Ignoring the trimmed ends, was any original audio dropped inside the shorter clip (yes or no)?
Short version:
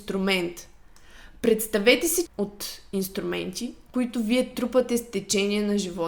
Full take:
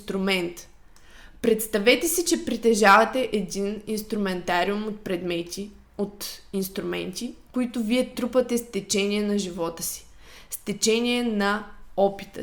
yes